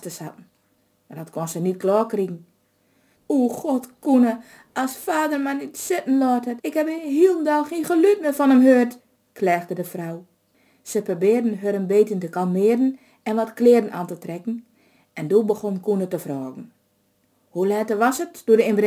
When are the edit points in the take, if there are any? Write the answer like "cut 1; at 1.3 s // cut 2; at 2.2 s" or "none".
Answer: cut 1; at 3.1 s // cut 2; at 6.6 s